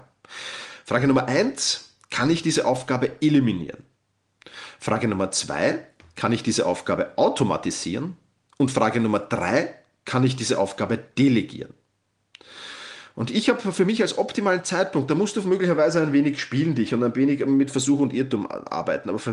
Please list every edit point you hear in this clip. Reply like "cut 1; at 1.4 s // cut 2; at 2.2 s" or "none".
none